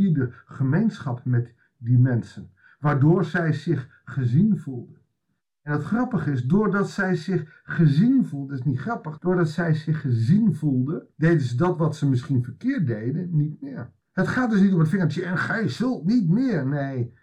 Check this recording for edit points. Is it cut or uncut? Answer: cut